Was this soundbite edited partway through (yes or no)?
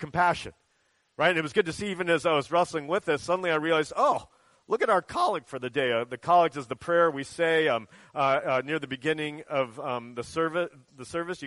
no